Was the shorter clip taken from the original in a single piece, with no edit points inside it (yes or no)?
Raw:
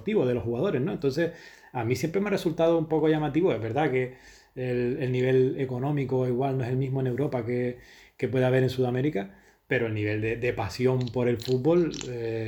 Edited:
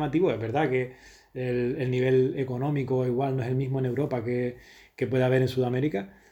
yes